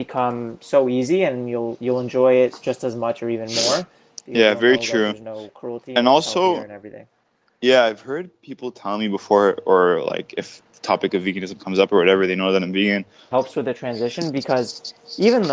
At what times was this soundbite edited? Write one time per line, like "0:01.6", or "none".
0:13.3